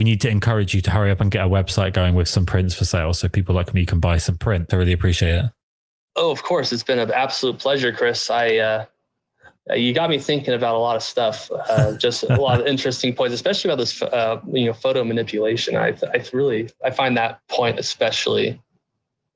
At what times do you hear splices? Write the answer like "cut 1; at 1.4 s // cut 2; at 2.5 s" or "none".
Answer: cut 1; at 4.7 s